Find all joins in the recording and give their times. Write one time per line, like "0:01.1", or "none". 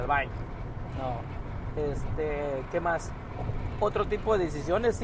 none